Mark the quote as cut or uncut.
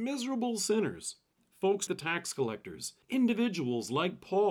cut